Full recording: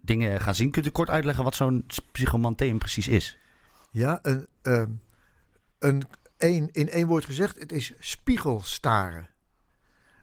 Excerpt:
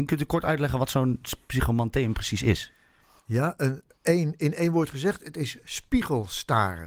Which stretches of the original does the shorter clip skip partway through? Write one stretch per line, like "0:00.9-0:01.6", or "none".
0:04.5-0:06.2